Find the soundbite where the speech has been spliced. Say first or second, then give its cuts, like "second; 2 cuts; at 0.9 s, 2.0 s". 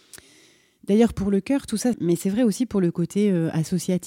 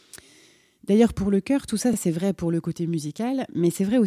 first; 1 cut; at 1.9 s